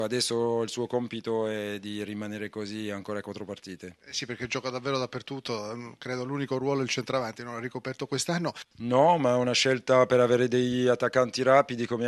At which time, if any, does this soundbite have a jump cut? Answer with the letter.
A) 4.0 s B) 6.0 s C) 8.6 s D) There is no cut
C